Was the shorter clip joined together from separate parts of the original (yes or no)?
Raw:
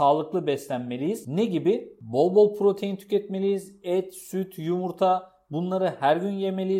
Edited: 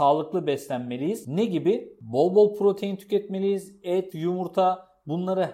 yes